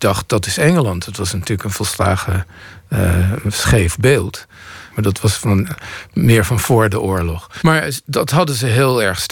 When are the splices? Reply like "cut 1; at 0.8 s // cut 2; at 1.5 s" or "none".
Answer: cut 1; at 4.9 s // cut 2; at 7.6 s